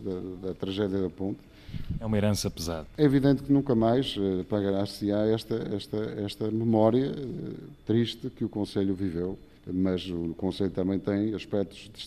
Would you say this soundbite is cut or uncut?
uncut